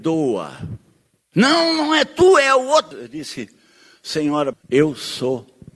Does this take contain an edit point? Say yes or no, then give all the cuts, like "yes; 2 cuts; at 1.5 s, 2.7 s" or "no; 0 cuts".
yes; 2 cuts; at 2.9 s, 4.5 s